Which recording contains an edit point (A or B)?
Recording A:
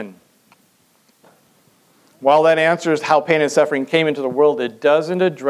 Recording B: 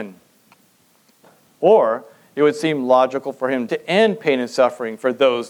B